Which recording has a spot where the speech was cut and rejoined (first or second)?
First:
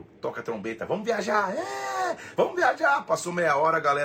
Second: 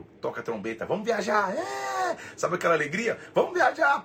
first